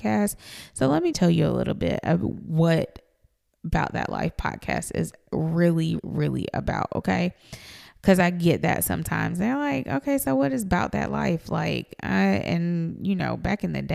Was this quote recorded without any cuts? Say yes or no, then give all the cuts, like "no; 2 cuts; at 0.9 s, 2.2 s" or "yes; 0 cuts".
no; 2 cuts; at 1.1 s, 6.0 s